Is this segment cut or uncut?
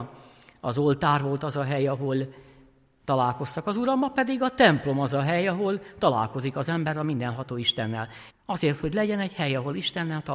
cut